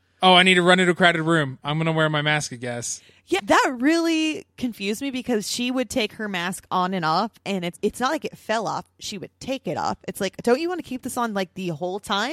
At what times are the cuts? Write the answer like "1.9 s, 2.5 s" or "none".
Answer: 3.4 s, 7.7 s